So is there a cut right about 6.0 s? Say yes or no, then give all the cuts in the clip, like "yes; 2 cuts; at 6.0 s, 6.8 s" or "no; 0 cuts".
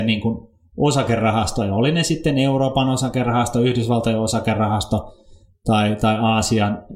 no; 0 cuts